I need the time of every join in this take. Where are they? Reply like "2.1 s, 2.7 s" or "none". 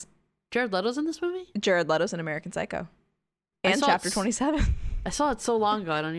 3.5 s